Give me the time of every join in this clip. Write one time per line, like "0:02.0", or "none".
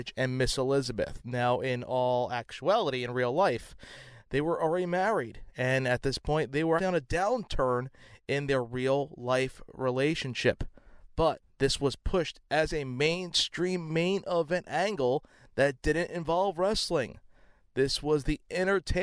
0:06.8